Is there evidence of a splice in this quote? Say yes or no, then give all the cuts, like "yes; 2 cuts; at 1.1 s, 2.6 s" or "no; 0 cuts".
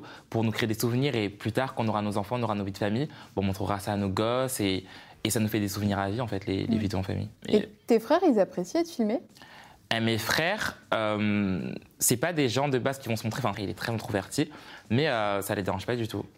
yes; 2 cuts; at 7.4 s, 13.5 s